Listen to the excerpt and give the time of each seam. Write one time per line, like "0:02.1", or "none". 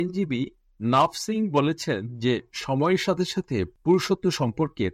none